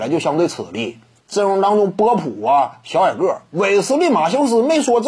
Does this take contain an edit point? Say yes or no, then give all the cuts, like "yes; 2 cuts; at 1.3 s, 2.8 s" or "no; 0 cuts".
yes; 1 cut; at 1.2 s